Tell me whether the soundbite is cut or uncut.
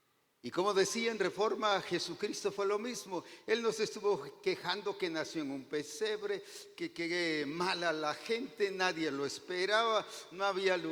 uncut